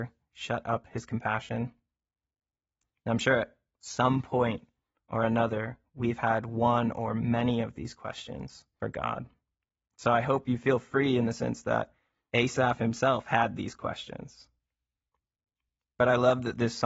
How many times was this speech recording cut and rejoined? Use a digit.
0